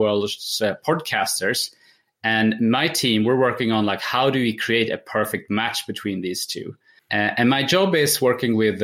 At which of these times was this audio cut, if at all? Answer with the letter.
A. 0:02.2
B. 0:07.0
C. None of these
B